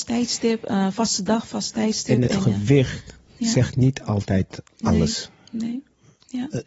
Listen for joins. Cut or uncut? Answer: cut